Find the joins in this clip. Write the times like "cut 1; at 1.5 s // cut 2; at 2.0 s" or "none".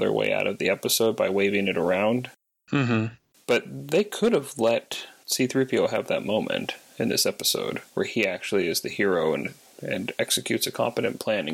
none